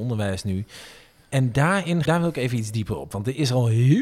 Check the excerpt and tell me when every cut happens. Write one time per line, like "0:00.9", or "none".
0:02.1